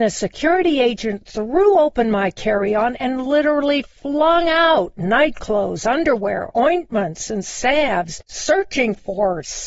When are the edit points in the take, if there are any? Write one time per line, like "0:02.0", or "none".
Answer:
none